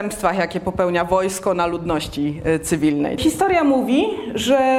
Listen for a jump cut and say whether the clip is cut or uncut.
cut